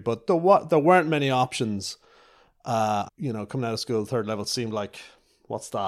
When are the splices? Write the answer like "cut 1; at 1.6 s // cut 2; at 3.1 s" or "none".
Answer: cut 1; at 3.1 s